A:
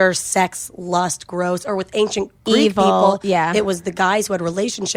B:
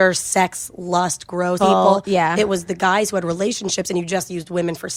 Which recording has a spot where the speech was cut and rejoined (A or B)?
B